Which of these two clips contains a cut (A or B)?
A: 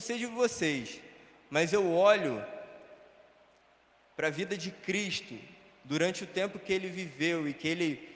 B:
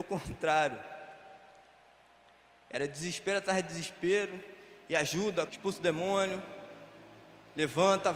B